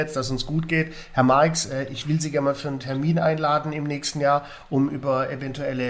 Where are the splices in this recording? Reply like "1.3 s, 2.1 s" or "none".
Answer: none